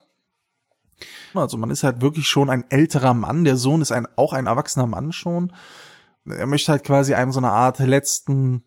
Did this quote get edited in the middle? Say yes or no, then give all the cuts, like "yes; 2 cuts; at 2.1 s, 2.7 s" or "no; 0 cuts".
yes; 2 cuts; at 1.3 s, 6.3 s